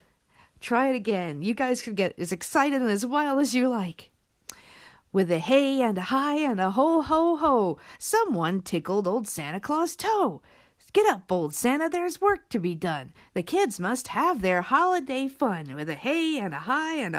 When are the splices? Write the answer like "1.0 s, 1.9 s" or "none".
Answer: none